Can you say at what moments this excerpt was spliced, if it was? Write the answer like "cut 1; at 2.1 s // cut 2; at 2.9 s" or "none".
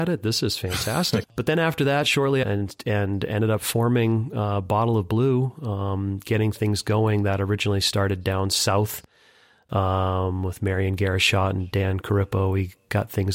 cut 1; at 1.2 s // cut 2; at 2.4 s